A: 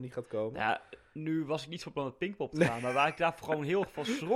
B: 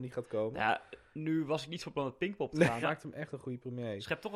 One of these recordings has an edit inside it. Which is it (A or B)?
B